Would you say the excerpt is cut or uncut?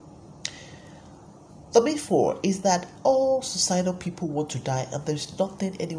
uncut